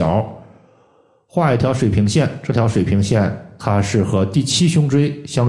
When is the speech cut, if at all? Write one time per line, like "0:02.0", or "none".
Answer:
none